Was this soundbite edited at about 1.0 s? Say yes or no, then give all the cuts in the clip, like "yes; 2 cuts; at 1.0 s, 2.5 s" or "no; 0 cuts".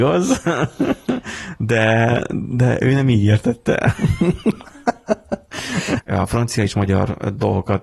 no; 1 cut; at 6.0 s